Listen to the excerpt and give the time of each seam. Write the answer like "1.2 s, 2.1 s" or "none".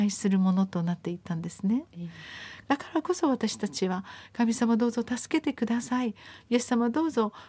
2.6 s